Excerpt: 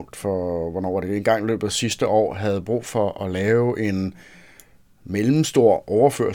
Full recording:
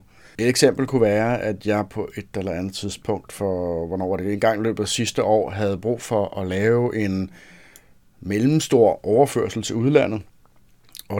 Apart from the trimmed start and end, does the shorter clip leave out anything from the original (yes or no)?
no